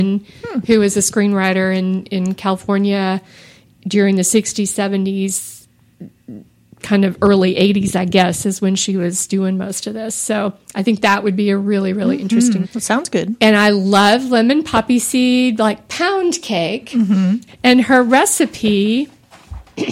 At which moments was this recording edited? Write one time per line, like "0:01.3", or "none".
0:12.6
0:17.5